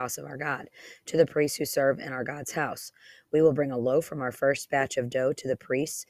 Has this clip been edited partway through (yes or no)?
no